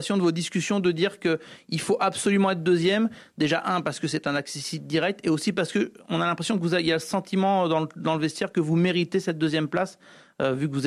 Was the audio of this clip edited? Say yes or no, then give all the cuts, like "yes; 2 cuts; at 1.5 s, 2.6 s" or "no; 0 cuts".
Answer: no; 0 cuts